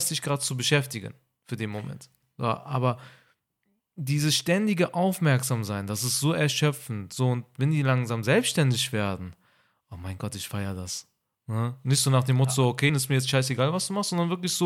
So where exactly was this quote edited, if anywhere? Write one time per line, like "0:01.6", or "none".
0:02.2
0:12.9